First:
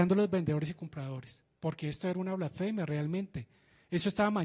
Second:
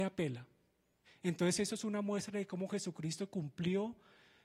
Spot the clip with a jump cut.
second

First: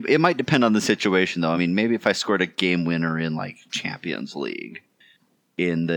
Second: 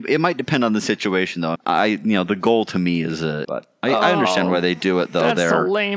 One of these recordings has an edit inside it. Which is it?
second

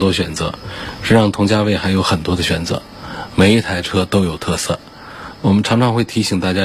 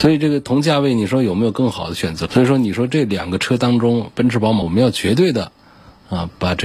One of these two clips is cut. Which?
second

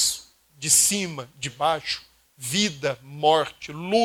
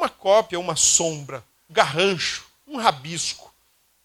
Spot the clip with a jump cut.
second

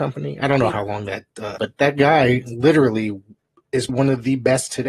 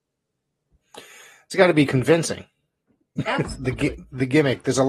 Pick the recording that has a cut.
first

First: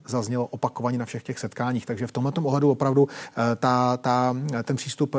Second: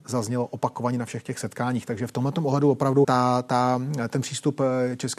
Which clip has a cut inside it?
second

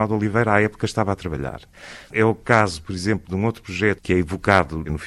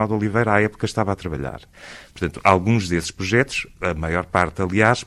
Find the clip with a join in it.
first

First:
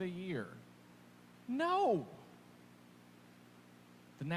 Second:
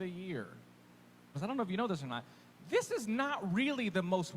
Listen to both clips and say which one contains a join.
second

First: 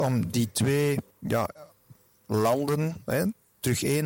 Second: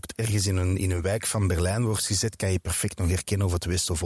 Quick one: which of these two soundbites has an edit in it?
first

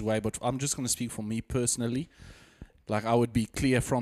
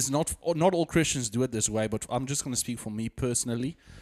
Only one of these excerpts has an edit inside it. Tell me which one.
first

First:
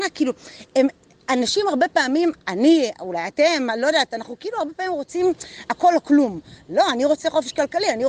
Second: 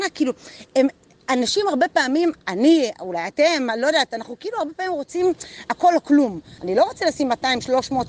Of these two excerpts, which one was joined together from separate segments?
second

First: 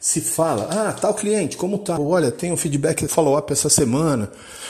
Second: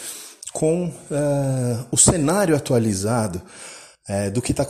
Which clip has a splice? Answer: first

